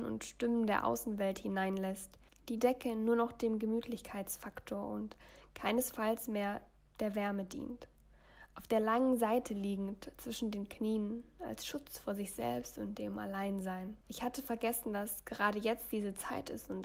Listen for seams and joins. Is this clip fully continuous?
no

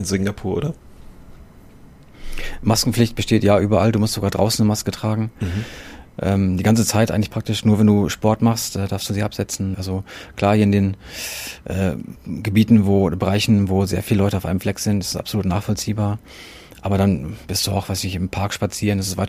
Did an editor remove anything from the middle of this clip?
yes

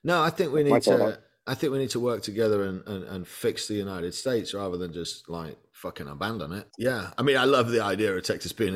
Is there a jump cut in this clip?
yes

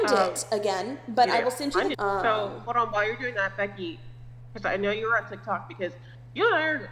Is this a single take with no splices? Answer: no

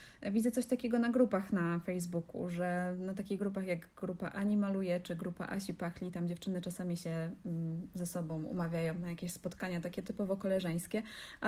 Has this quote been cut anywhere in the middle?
no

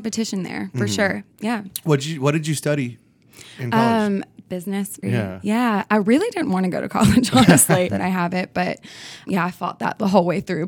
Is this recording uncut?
no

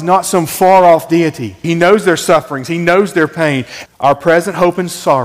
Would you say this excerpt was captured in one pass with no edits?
no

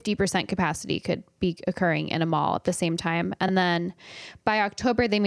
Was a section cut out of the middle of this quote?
no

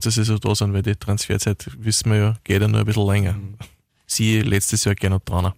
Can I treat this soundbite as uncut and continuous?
yes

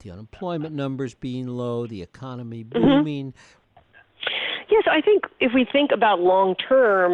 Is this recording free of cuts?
no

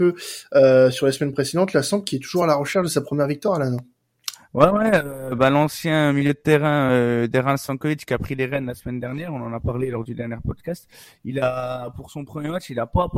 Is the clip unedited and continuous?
yes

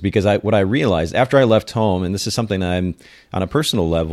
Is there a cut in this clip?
no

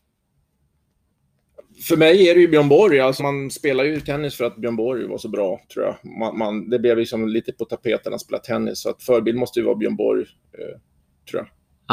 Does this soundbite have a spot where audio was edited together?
yes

